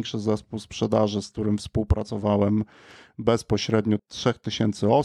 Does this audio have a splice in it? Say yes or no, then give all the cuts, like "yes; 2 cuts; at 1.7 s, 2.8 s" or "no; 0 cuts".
yes; 1 cut; at 4.0 s